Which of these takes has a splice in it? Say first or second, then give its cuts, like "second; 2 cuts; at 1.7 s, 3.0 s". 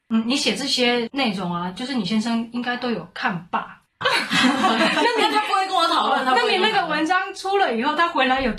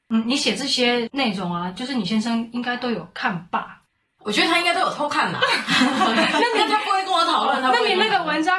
first; 1 cut; at 4.0 s